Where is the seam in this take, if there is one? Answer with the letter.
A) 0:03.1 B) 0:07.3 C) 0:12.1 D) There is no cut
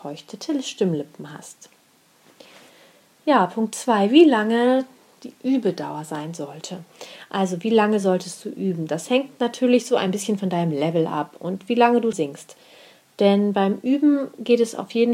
C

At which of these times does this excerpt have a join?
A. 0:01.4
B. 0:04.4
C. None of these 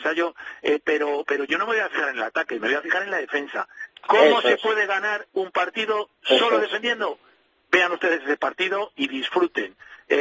C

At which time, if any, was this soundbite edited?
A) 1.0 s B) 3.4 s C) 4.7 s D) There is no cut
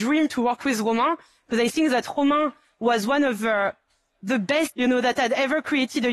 C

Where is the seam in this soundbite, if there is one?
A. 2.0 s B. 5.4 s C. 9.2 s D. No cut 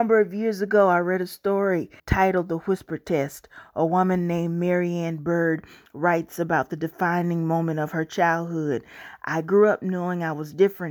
A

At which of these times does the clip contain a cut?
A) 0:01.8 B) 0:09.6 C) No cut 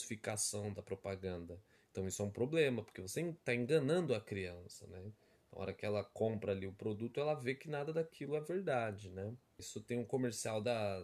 B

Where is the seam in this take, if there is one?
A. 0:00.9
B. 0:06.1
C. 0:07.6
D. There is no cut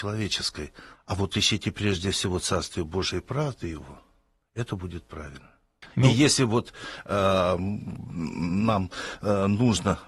A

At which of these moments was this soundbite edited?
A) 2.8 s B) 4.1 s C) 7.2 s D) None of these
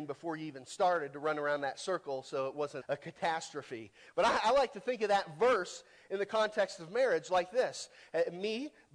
A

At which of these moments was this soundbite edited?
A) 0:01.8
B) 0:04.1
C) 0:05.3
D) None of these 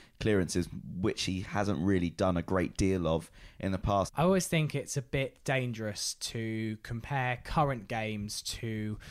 B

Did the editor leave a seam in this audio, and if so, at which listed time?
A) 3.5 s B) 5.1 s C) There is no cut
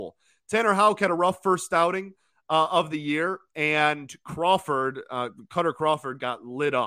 C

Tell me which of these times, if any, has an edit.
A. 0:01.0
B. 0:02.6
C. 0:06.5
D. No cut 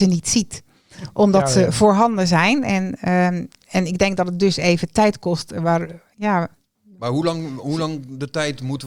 D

